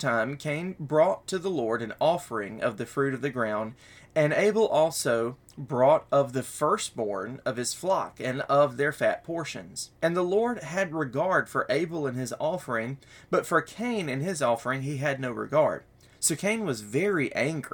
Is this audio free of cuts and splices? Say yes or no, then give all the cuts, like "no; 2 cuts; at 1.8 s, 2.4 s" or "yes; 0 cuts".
no; 1 cut; at 10.0 s